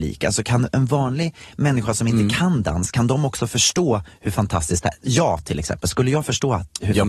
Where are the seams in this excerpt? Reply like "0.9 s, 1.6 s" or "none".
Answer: none